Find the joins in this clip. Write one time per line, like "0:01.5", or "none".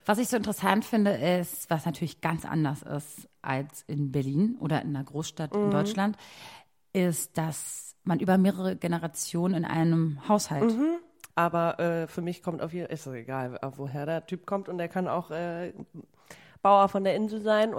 0:11.3